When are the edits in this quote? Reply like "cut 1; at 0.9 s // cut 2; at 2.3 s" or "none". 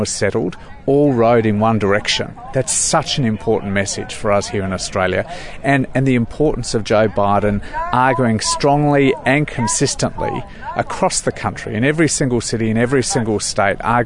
none